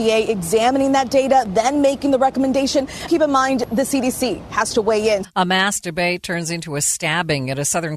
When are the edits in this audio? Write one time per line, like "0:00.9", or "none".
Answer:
0:03.1
0:05.2

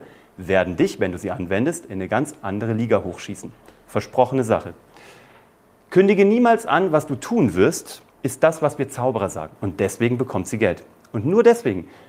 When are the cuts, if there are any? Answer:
0:08.1
0:09.6

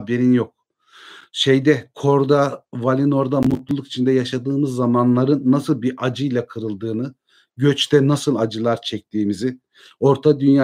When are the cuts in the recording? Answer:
none

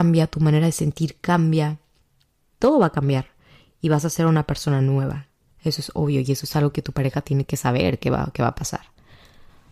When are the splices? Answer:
none

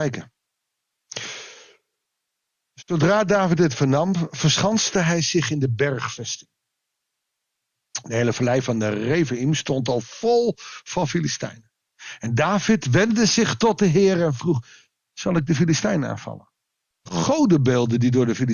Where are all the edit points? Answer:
0:16.9

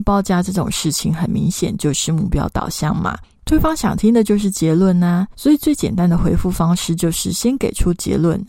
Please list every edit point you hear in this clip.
0:05.3

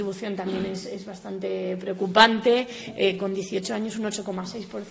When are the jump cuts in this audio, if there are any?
none

